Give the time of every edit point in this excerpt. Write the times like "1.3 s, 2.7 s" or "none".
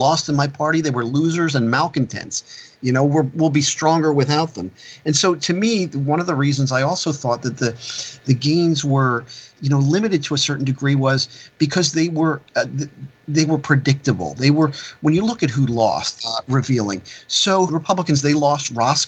16.2 s, 17.7 s